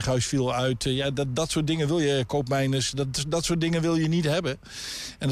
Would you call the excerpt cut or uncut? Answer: uncut